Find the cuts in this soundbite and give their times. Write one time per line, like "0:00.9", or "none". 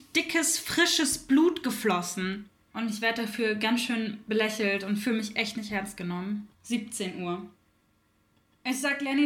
0:02.7
0:06.5